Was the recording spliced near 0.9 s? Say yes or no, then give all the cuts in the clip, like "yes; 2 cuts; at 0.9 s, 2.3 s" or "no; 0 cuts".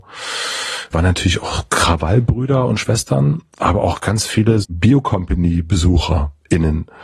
yes; 2 cuts; at 0.9 s, 4.6 s